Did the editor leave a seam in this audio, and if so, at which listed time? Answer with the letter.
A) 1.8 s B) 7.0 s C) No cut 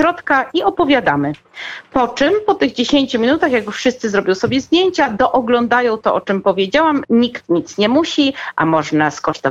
B